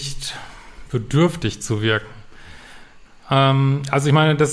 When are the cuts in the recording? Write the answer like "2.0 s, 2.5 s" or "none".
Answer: none